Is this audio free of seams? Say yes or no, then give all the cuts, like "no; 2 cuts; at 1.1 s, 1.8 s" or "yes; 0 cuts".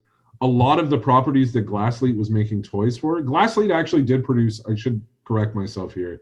yes; 0 cuts